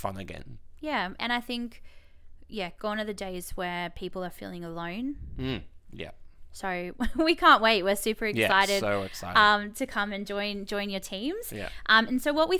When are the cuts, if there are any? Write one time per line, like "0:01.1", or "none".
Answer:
none